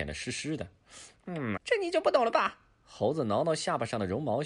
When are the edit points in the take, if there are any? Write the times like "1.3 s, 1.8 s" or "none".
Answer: 1.6 s